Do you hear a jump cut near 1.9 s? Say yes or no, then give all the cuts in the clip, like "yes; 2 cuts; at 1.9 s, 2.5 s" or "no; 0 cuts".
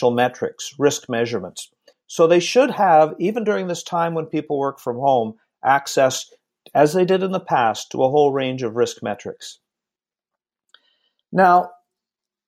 yes; 1 cut; at 1.9 s